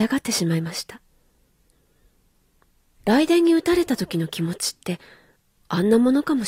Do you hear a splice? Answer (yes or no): no